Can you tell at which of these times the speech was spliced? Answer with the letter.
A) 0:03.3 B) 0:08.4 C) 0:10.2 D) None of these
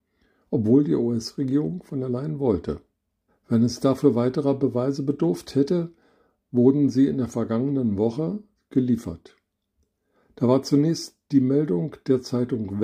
A